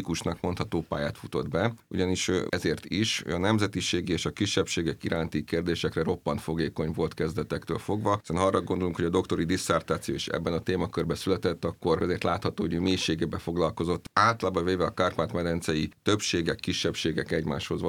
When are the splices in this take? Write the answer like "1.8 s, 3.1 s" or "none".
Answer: 2.5 s